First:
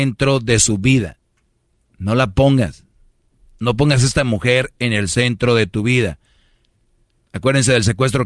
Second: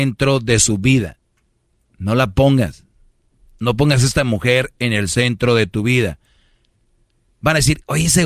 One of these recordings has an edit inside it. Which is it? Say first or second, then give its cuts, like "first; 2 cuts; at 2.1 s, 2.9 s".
first; 1 cut; at 7.2 s